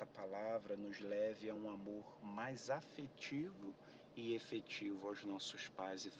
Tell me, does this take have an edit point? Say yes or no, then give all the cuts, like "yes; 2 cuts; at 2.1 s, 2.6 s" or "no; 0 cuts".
no; 0 cuts